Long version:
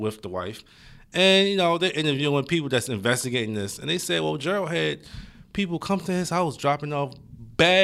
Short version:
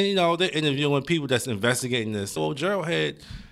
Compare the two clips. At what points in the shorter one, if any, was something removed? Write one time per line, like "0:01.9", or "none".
0:02.4